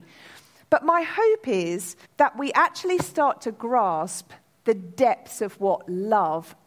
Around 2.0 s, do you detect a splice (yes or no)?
yes